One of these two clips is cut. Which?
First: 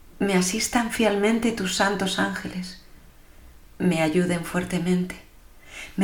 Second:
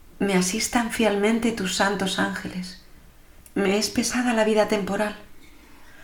second; 1 cut; at 3.4 s

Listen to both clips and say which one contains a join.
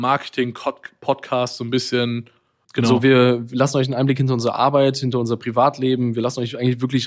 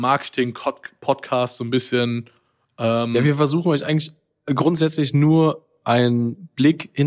first; 1 cut; at 2.6 s

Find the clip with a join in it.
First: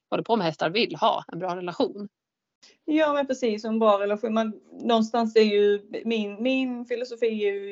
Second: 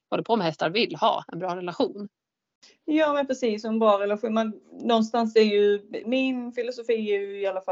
second; 1 cut; at 6.0 s

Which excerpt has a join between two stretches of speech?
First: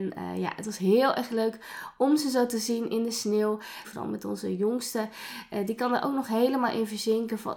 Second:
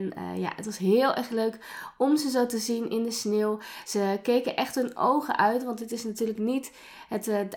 first; 1 cut; at 3.8 s

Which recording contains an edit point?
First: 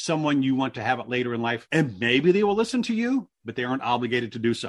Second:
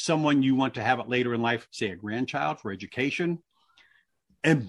first; 1 cut; at 1.7 s

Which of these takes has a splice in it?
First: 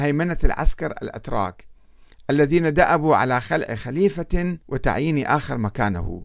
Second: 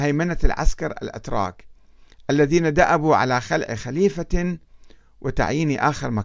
first; 1 cut; at 4.6 s

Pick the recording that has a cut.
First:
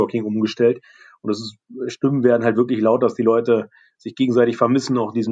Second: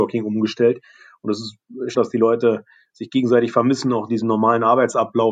second; 1 cut; at 1.9 s

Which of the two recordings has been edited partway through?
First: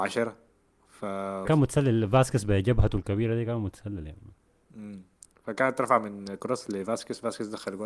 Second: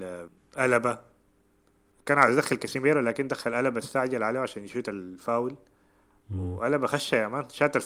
first; 1 cut; at 1.5 s

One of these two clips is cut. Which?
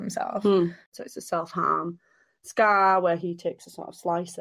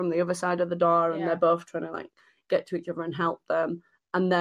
first; 1 cut; at 0.9 s

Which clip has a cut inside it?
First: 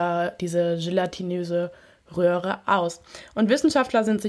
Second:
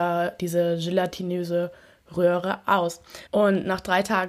second; 1 cut; at 3.3 s

